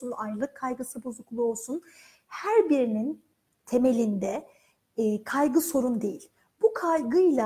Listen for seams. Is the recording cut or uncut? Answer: uncut